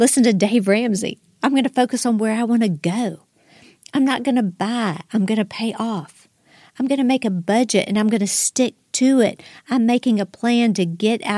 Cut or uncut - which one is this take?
uncut